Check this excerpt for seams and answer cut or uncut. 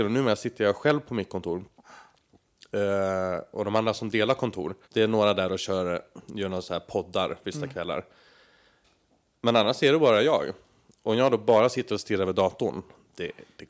cut